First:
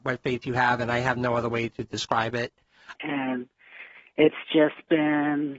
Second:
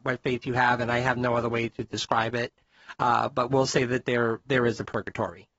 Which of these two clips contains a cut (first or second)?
first